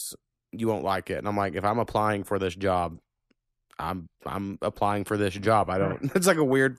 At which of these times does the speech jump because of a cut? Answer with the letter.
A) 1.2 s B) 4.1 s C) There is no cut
B